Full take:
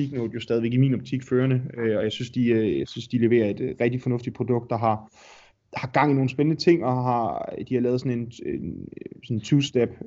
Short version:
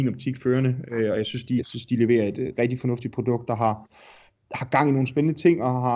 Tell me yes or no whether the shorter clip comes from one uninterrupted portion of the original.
no